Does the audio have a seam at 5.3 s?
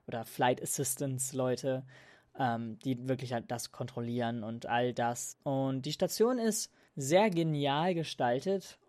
yes; 1 cut; at 5.3 s

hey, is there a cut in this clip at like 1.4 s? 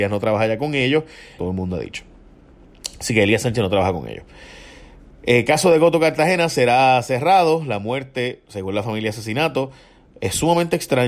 yes; 1 cut; at 1.4 s

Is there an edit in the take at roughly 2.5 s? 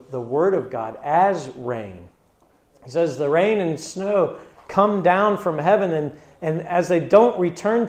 no; 0 cuts

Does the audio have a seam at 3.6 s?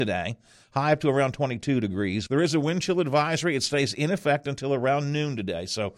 no; 1 cut; at 2.3 s

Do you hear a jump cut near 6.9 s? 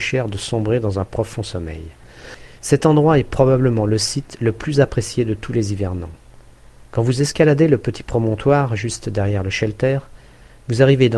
no; 1 cut; at 2.6 s

